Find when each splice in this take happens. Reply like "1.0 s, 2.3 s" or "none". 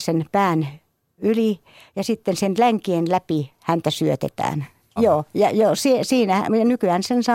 5.0 s